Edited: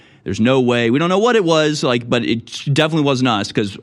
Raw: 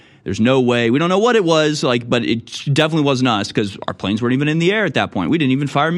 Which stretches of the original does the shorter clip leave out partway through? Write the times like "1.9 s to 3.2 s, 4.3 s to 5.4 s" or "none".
none

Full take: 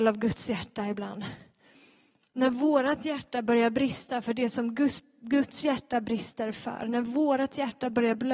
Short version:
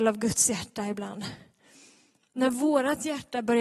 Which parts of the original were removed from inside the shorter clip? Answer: none

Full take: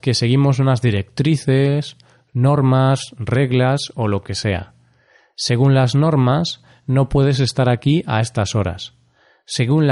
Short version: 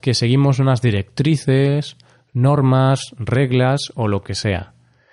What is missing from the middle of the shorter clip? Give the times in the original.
none

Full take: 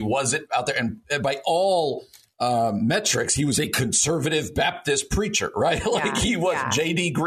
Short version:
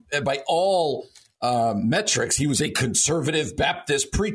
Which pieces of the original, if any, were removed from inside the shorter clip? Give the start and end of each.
none

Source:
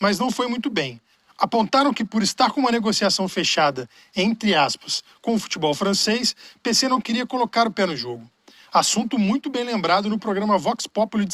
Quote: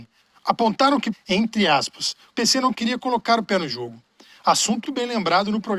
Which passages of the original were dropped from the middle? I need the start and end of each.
2.1 s to 4.0 s, 5.2 s to 6.6 s, 9.1 s to 9.4 s

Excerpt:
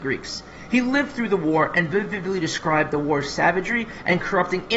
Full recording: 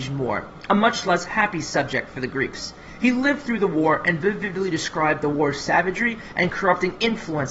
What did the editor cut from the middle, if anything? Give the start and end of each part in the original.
none

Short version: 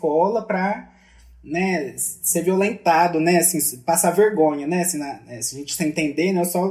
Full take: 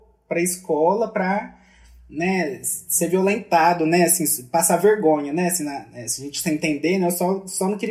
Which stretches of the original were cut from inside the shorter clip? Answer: none

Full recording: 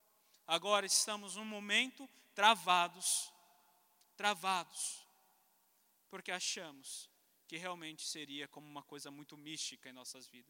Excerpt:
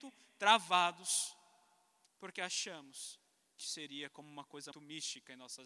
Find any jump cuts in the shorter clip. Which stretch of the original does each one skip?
4.0 s to 6.0 s, 7.5 s to 8.0 s, 9.1 s to 9.3 s

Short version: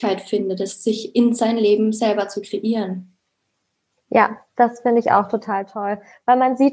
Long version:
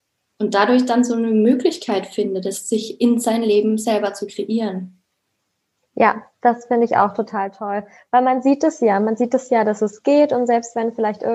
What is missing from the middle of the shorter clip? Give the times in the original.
none

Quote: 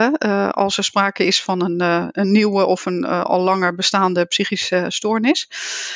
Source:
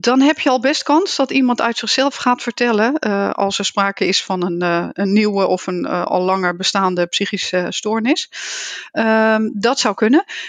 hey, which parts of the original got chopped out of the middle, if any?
none

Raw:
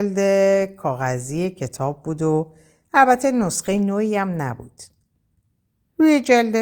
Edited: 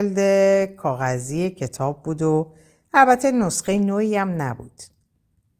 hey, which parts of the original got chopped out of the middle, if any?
none

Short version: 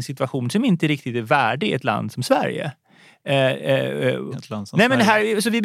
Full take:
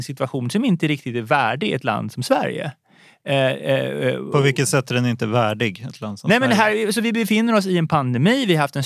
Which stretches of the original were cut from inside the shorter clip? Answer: 4.3 s to 5.8 s

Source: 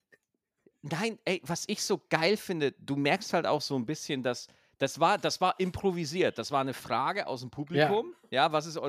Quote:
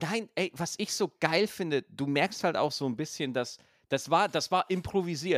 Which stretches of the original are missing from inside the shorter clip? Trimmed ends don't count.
none

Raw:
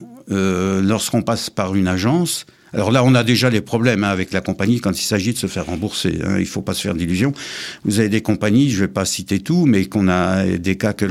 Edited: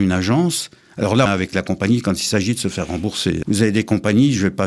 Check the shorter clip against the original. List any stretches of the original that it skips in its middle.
3.0 s to 4.0 s, 6.2 s to 7.8 s

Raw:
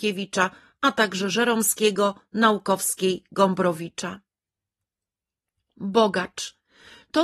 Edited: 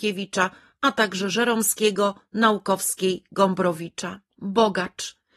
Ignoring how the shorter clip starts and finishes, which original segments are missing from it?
4.3 s to 5.7 s

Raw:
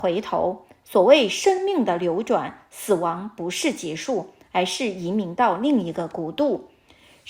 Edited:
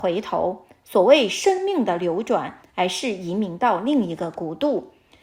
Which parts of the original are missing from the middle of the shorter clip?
2.6 s to 4.4 s

